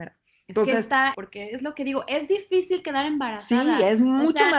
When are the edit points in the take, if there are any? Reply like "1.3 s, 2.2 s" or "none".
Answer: 1.1 s